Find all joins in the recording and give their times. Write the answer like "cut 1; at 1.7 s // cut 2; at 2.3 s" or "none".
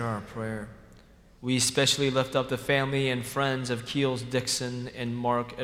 cut 1; at 1.4 s